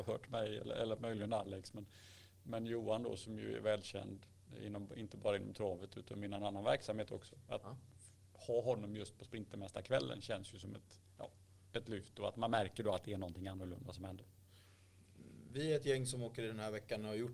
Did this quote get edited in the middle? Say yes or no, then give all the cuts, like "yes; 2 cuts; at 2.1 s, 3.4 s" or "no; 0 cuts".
no; 0 cuts